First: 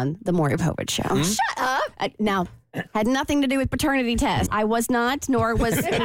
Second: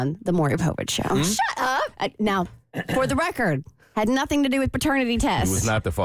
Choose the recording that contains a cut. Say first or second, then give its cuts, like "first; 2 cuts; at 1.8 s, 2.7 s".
first; 2 cuts; at 2.9 s, 4.5 s